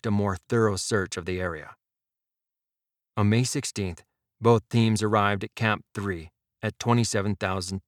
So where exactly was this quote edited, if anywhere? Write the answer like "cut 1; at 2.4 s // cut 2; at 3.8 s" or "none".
none